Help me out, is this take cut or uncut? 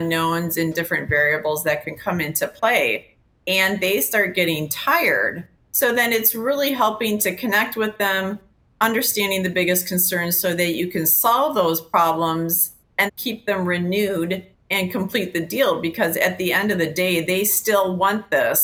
cut